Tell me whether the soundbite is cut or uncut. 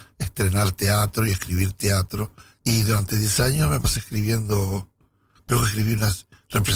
cut